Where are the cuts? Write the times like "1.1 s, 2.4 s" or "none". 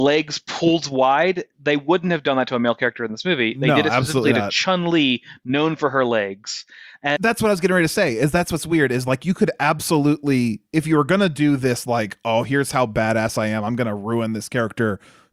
7.2 s